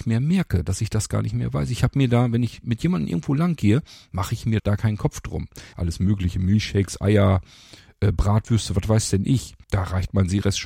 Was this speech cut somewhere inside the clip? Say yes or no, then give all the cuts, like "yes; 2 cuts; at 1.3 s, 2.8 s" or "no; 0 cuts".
yes; 3 cuts; at 4.6 s, 5.7 s, 9.6 s